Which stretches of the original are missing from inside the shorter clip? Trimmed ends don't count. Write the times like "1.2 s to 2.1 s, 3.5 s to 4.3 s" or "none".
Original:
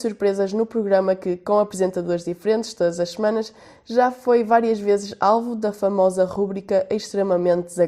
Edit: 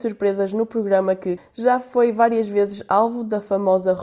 1.4 s to 3.7 s